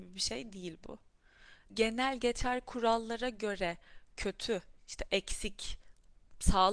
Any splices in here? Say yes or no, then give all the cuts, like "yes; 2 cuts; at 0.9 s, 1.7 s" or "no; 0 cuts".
yes; 2 cuts; at 1.7 s, 4.8 s